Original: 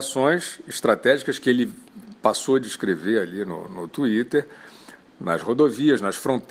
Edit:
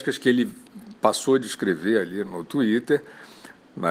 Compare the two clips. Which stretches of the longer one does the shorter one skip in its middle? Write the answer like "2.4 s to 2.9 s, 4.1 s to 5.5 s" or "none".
3.5 s to 3.7 s